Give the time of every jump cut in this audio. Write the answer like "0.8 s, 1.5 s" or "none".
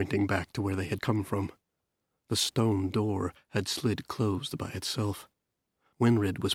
1.0 s